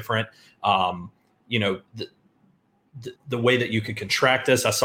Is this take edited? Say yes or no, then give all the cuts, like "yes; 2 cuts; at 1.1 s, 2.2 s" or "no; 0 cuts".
yes; 2 cuts; at 1.9 s, 3.2 s